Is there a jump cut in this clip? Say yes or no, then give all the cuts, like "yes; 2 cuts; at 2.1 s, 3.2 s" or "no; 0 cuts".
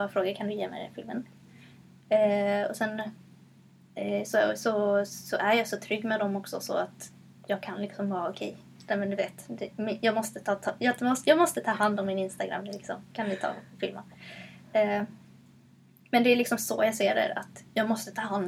no; 0 cuts